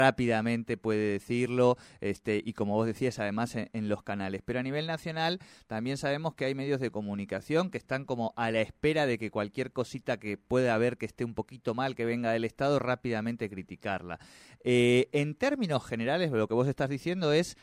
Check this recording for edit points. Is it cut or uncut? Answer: uncut